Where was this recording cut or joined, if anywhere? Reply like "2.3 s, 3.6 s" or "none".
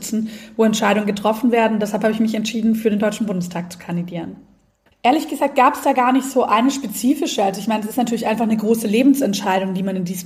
4.9 s